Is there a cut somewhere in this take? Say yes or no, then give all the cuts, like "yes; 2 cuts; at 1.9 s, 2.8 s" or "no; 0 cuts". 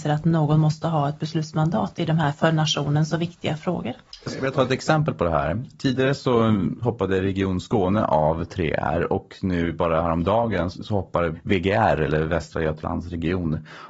no; 0 cuts